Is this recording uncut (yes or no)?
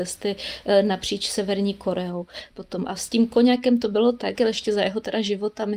no